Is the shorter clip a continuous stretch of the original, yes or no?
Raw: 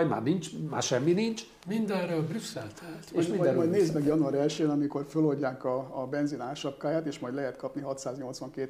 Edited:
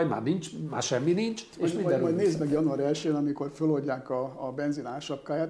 no